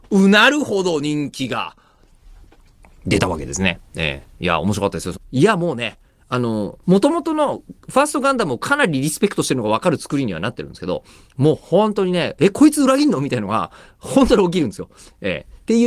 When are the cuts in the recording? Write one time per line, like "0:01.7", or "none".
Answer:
0:05.1
0:06.8